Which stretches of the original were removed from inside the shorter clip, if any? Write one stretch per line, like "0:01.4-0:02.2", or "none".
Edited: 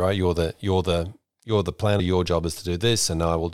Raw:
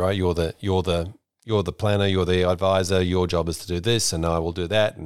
0:02.0-0:03.0